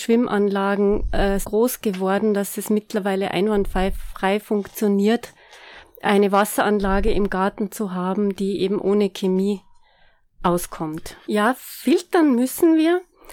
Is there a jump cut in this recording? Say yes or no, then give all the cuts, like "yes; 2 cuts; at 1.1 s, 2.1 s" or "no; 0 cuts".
yes; 2 cuts; at 1.4 s, 11.2 s